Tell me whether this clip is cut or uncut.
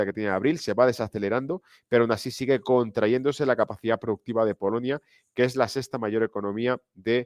uncut